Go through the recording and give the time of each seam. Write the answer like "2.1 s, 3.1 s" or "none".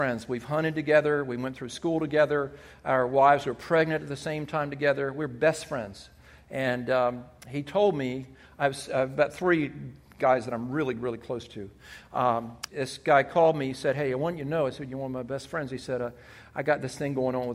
12.7 s